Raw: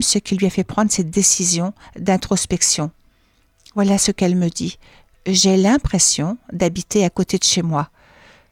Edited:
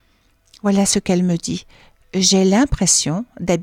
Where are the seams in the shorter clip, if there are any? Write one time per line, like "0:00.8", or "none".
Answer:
none